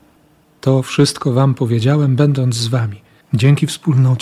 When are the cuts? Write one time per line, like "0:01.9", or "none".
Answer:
0:03.2